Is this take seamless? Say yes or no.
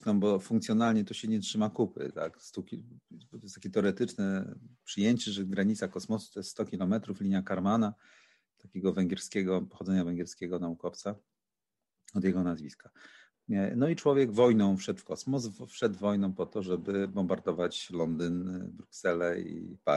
no